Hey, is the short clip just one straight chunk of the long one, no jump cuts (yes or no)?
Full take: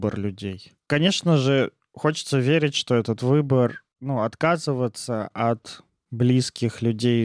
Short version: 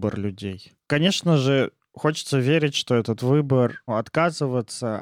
no